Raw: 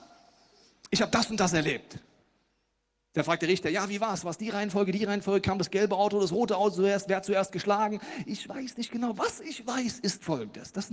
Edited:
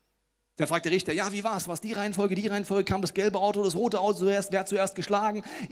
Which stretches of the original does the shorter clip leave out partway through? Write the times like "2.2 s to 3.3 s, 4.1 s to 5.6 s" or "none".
none